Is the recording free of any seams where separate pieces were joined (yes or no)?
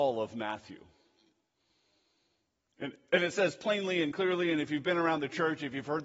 yes